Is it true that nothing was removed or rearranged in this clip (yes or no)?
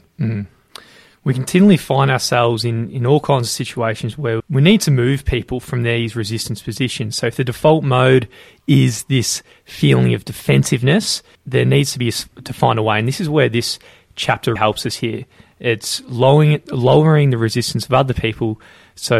no